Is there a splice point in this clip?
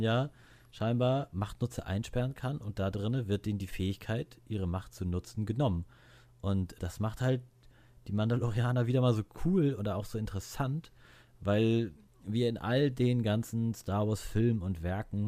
no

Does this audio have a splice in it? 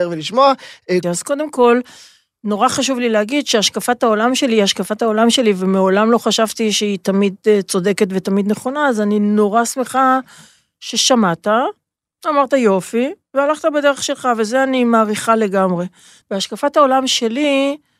yes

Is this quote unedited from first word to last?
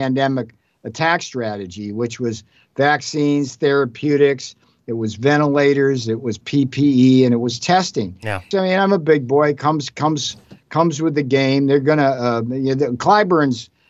no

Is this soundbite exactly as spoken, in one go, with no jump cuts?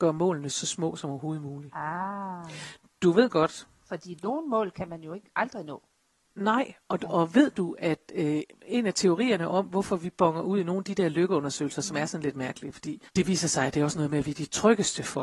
no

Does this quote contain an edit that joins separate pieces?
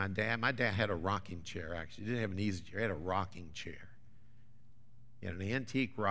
no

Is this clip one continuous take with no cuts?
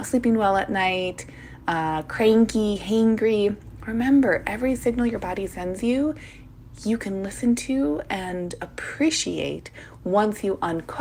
yes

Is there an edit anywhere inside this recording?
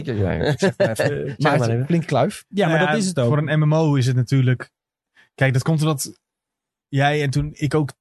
no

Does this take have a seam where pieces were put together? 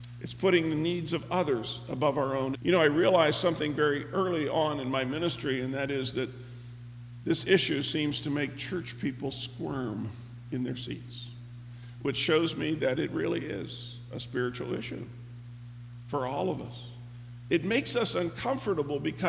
yes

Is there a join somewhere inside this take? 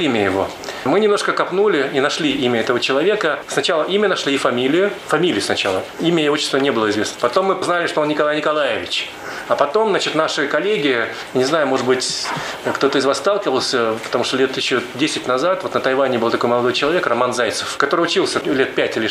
yes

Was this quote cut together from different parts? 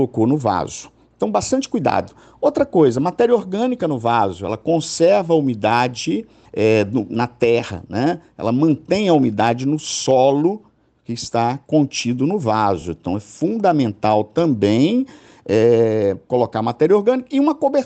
no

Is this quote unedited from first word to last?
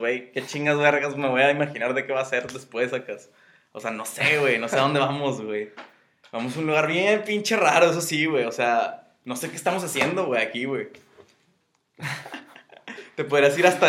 yes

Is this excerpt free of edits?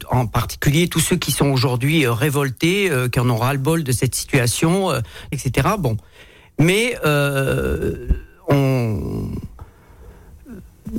no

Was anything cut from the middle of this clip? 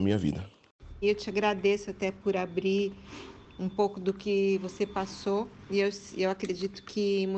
yes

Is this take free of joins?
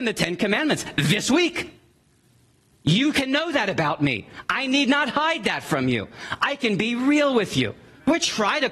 yes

